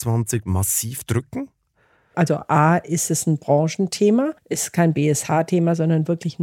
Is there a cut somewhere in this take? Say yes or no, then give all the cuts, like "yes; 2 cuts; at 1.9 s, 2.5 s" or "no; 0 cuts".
yes; 2 cuts; at 2.1 s, 4.4 s